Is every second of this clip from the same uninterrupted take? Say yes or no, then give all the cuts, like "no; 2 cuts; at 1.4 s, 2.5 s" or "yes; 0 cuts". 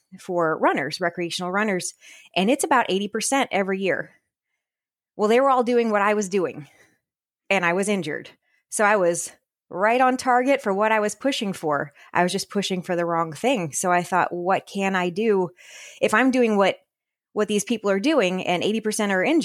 yes; 0 cuts